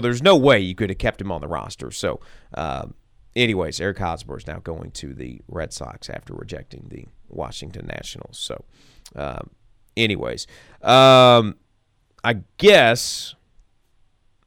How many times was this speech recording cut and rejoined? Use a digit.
0